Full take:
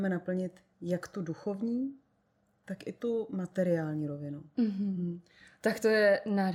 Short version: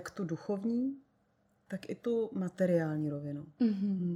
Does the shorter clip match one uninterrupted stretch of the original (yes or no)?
yes